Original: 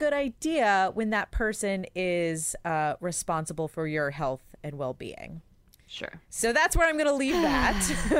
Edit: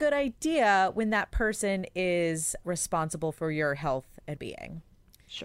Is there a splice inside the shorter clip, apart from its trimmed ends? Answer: yes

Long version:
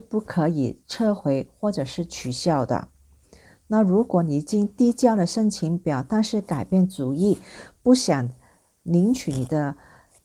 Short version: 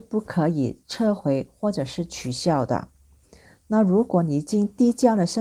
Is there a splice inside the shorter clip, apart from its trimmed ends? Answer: no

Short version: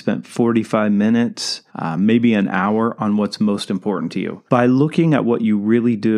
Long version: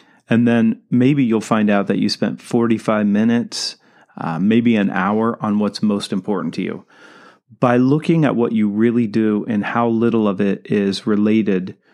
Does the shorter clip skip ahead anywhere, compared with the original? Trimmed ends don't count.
yes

